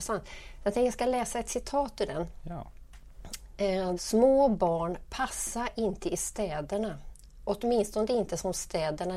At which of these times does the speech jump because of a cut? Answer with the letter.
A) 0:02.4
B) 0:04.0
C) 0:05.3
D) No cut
B